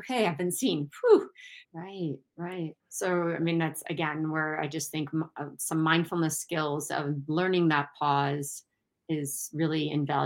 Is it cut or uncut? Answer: cut